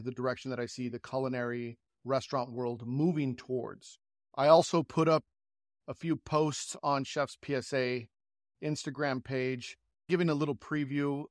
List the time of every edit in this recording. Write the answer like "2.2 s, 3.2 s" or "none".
none